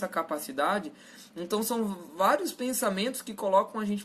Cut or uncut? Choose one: uncut